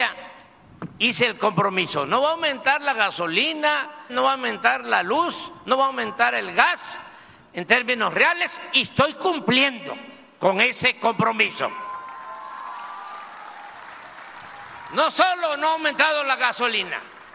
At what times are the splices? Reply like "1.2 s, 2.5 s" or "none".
4.1 s